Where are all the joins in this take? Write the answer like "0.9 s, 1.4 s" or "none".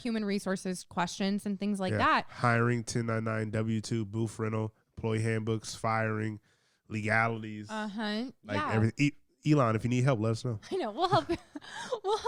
none